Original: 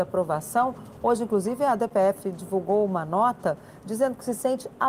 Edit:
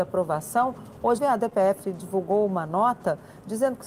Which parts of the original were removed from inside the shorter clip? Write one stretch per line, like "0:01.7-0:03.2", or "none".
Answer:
0:01.2-0:01.6